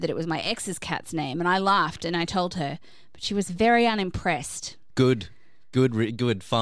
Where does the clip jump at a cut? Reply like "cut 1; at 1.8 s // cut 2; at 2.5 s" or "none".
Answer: cut 1; at 4.9 s